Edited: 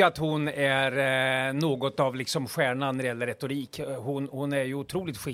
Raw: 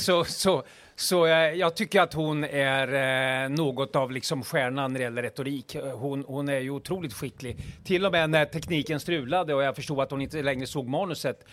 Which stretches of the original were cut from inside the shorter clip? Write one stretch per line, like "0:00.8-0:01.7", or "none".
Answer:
none